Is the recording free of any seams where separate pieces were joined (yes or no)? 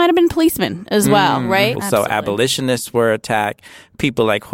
no